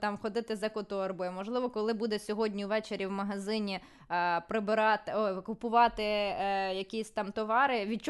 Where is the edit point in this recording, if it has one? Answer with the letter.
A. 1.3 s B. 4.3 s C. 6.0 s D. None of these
D